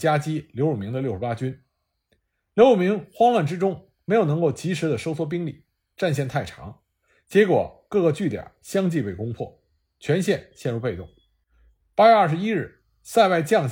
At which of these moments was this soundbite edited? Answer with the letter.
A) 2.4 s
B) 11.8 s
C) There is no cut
B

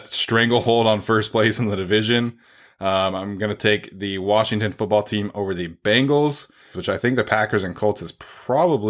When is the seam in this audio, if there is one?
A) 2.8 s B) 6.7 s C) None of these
B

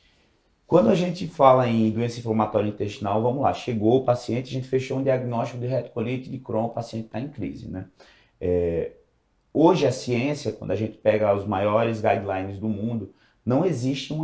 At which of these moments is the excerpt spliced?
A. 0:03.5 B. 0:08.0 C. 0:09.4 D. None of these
D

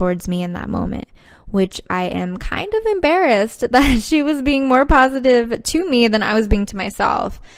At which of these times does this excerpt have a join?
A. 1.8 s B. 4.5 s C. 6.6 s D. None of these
A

